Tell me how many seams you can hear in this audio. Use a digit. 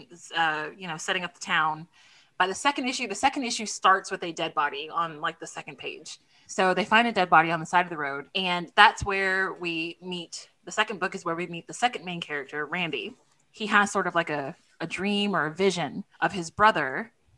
3